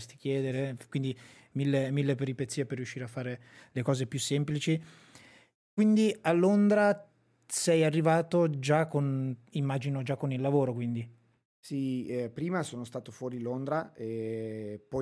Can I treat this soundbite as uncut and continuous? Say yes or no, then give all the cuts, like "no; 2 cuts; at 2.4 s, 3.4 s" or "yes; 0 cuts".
yes; 0 cuts